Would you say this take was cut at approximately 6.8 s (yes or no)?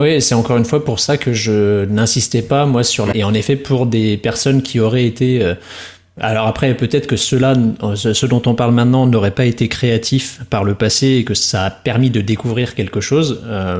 no